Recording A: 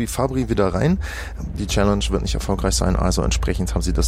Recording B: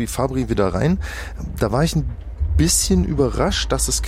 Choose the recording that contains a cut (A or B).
A